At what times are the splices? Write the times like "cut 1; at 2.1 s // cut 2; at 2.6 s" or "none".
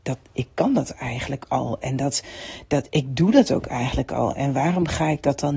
none